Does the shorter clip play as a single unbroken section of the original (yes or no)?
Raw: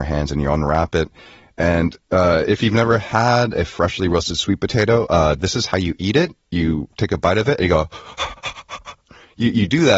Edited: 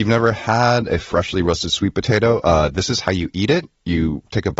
yes